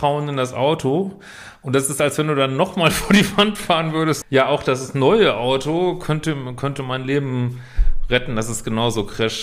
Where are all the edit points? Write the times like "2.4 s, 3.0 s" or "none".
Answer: 4.2 s